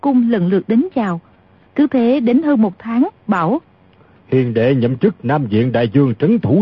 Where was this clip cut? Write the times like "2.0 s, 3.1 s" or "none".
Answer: 1.7 s, 3.1 s